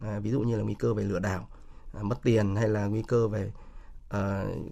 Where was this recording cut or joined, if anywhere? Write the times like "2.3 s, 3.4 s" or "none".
none